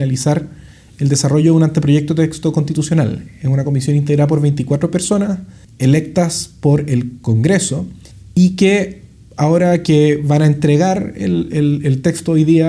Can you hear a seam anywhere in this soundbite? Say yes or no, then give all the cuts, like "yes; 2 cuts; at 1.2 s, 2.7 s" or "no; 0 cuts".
no; 0 cuts